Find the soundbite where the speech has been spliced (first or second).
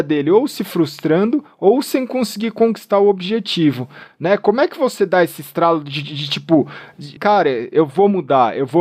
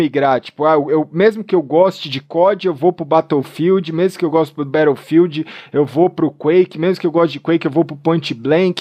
first